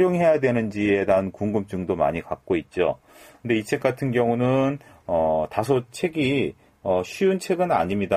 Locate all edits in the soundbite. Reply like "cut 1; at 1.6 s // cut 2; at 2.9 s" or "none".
none